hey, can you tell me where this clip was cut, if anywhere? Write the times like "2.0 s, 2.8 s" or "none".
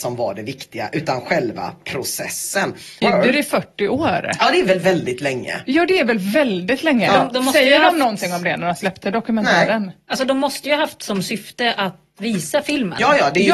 3.0 s